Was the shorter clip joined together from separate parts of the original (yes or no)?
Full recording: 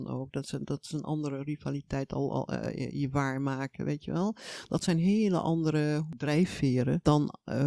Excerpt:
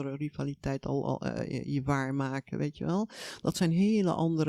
no